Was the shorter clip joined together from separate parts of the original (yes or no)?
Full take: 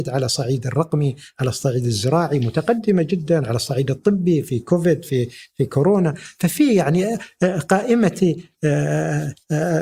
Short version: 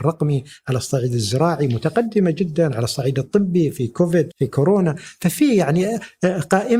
yes